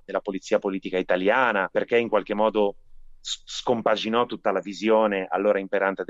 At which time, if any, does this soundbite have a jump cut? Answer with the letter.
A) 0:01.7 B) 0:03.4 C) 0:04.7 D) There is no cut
A